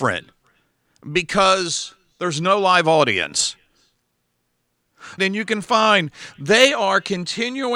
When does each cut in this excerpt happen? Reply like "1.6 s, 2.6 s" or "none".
5.2 s